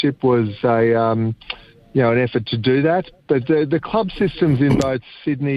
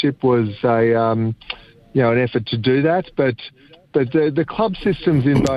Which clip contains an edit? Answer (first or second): first